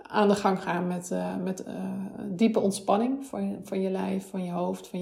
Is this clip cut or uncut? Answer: uncut